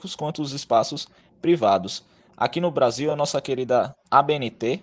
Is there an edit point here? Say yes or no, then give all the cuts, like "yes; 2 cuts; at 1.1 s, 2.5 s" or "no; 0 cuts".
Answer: no; 0 cuts